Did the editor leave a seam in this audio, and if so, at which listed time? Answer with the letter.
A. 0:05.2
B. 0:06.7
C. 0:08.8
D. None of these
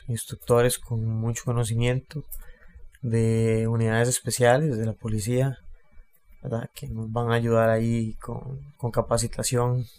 C